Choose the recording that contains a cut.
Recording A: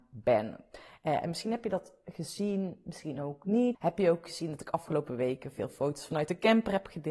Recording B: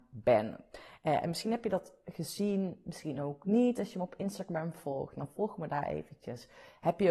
A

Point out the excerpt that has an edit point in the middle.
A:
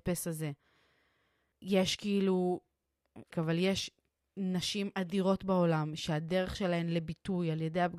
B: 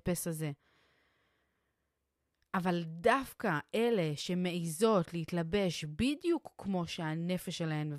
A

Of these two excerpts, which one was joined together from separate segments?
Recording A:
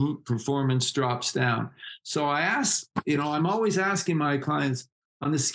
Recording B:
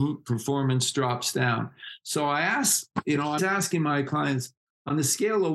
B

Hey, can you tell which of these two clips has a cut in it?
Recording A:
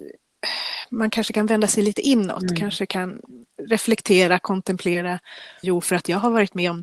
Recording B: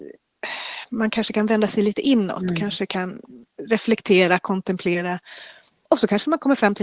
A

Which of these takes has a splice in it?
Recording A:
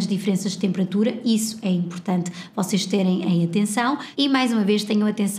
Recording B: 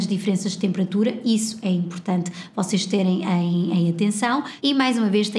A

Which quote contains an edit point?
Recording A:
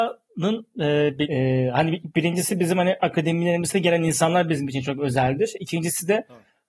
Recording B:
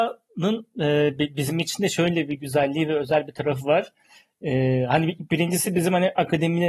A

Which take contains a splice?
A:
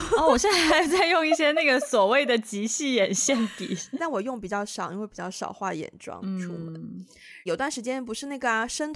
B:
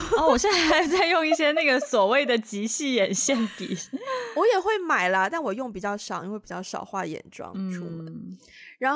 A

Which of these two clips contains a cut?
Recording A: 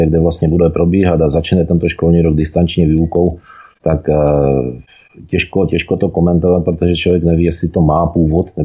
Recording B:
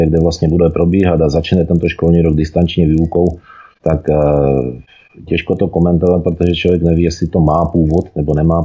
B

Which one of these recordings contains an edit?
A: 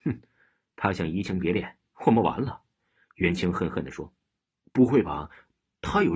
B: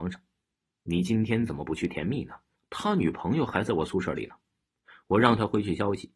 B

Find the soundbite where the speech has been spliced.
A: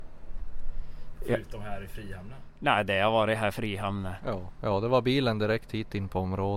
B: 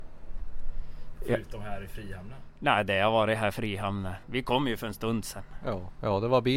A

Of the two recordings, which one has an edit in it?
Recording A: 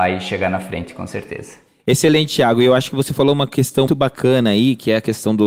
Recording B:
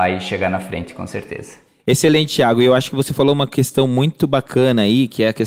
A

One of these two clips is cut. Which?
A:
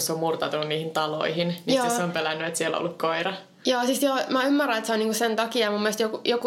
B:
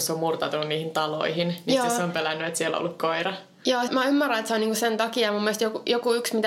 B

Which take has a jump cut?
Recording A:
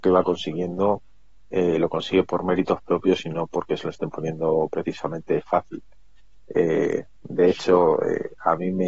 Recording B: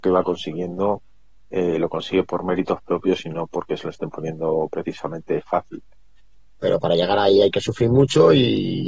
B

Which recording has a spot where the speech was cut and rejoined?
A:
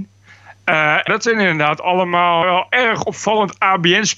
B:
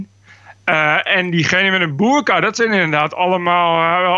A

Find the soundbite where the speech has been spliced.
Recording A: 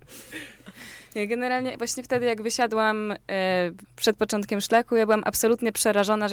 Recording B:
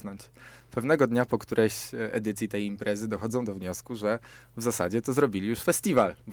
A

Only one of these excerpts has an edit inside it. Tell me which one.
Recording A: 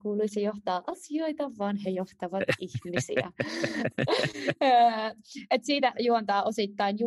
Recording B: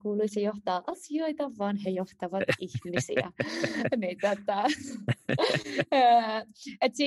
A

